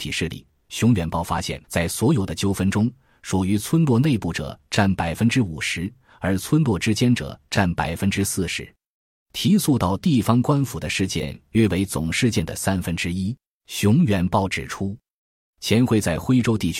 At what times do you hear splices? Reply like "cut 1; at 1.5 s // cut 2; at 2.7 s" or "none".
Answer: cut 1; at 1.6 s // cut 2; at 13.6 s

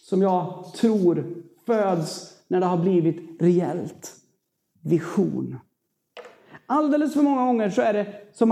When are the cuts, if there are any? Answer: none

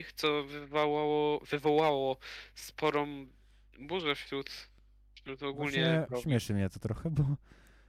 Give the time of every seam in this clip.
cut 1; at 6.1 s

